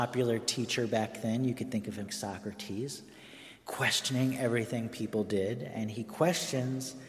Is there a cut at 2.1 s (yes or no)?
yes